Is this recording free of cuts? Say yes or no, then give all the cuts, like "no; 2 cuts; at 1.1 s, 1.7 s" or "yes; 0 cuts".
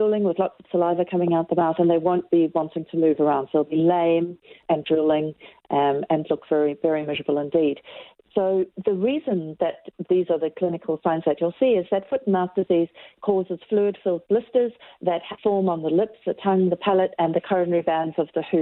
yes; 0 cuts